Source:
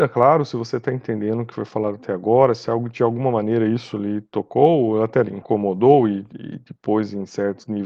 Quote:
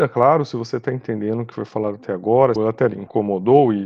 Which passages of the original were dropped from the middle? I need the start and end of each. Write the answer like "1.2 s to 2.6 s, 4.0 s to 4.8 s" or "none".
2.6 s to 4.9 s